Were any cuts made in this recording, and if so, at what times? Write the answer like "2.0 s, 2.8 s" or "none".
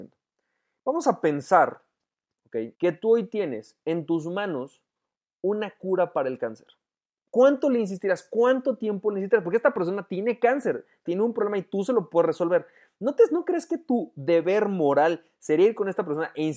2.7 s, 7.3 s, 11.1 s